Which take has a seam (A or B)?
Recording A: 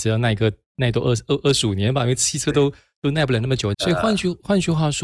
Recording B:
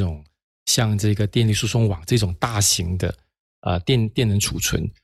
A